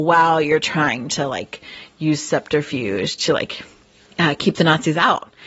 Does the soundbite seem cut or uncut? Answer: uncut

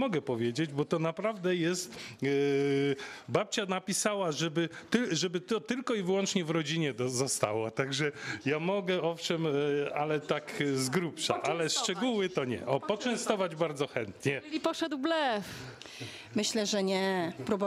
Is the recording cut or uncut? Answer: uncut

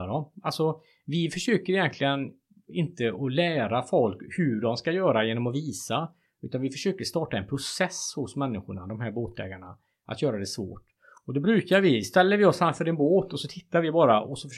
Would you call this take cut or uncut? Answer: uncut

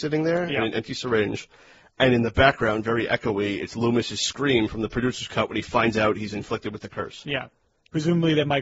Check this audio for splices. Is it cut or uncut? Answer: uncut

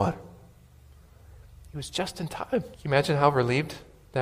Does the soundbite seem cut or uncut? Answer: cut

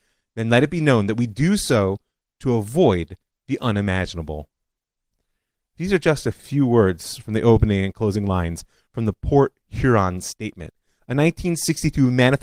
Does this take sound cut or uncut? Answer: uncut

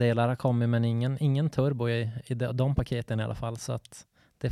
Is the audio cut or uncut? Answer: uncut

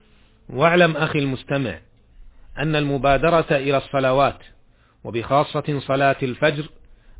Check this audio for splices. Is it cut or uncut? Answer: uncut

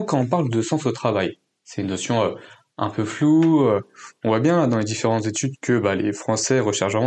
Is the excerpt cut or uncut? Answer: uncut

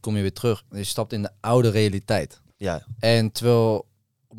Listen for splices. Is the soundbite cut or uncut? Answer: cut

